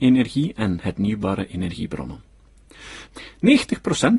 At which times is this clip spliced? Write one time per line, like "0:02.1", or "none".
0:03.1